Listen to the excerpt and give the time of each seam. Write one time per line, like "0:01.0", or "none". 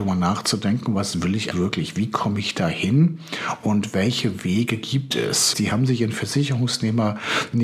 0:01.5
0:05.5